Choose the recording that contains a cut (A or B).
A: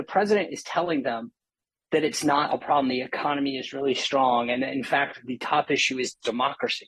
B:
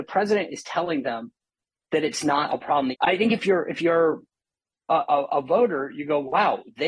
B